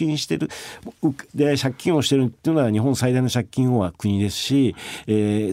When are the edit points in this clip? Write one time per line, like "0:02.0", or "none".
0:01.3